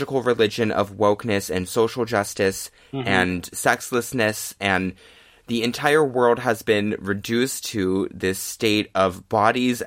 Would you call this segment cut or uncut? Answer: uncut